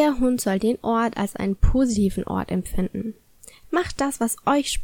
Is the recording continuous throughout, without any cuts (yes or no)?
no